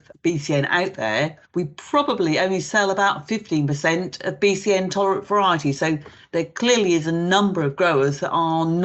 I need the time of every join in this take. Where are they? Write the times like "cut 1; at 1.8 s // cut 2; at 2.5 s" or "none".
cut 1; at 1.4 s